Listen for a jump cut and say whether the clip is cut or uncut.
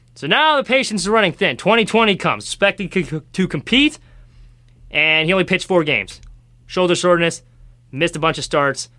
uncut